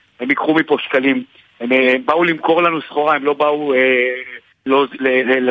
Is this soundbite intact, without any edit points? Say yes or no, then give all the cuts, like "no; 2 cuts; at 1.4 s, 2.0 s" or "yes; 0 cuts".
yes; 0 cuts